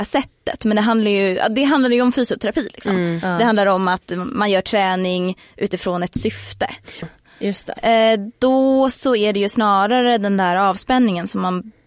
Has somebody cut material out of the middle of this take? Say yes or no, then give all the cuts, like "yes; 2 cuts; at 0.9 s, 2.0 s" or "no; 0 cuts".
yes; 1 cut; at 7.0 s